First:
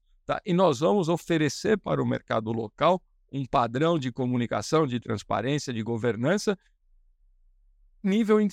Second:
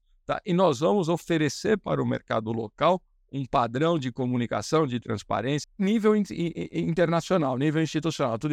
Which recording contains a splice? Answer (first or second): second